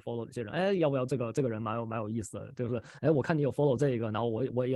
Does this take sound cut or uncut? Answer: uncut